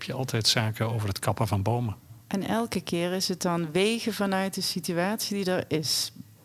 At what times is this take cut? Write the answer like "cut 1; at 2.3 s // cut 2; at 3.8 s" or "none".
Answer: cut 1; at 2.2 s